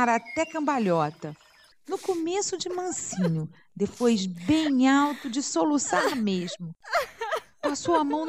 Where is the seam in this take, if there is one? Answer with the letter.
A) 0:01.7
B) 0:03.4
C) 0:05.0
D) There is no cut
A